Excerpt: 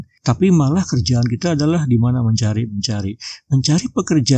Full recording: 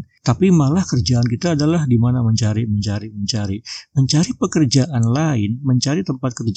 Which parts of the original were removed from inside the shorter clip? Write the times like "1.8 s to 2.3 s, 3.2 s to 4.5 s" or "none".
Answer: 2.7 s to 3.1 s

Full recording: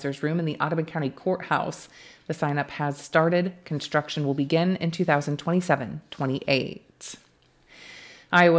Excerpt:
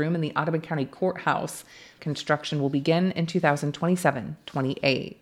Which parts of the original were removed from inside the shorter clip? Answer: 2.2 s to 3.6 s

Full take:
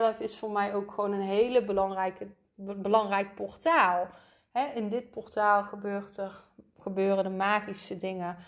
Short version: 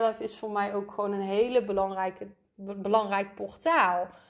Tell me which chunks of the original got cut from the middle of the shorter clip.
none

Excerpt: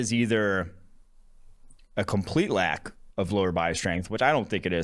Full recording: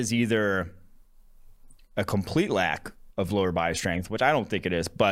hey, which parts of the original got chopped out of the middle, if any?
none

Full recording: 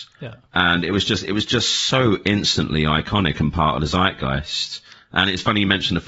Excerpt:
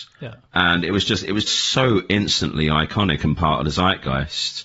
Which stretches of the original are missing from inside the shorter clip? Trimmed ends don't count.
1.5 s to 1.6 s

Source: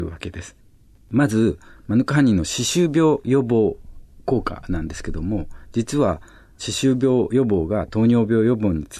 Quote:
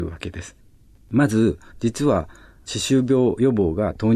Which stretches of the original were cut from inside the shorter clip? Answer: 1.7 s to 5.6 s

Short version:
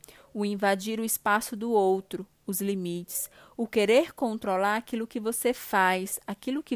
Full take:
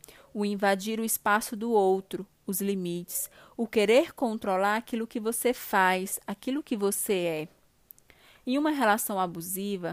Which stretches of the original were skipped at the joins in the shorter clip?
none

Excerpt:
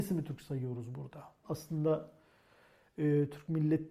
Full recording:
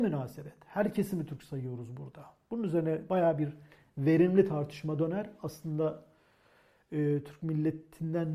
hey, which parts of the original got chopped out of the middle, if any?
2.4 s to 5.4 s

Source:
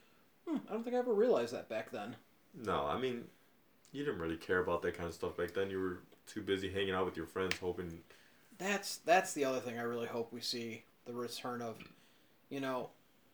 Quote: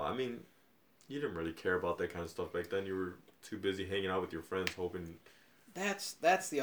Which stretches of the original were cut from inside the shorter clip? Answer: none

